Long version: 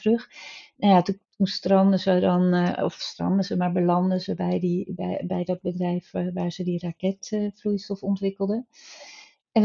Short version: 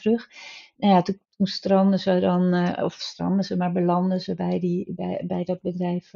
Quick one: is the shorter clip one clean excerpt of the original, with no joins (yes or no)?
yes